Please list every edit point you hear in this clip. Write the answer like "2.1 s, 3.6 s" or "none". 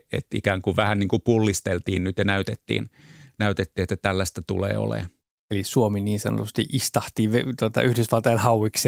none